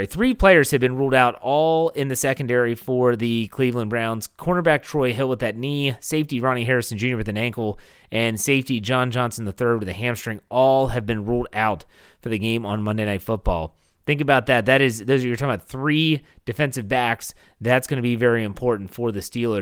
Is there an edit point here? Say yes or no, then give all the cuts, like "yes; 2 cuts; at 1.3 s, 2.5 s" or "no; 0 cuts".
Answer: no; 0 cuts